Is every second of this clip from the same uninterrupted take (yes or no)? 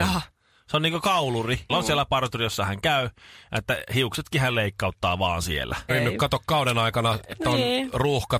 no